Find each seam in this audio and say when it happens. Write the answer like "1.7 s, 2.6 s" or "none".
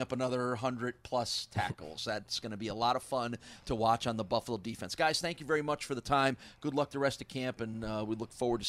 none